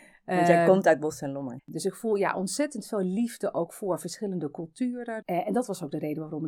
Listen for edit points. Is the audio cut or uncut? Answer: cut